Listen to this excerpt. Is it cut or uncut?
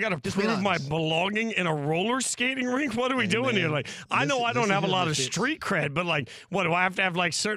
uncut